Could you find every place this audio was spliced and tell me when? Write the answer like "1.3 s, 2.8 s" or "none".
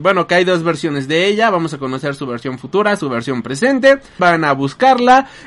4.2 s